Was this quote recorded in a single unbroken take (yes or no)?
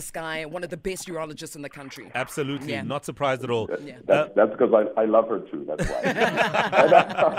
yes